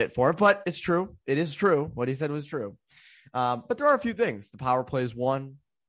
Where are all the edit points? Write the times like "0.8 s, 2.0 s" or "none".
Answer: none